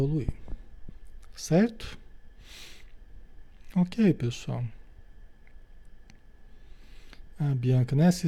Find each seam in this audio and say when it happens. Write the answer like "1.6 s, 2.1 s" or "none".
none